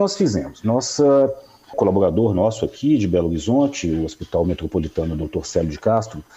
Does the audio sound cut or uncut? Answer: cut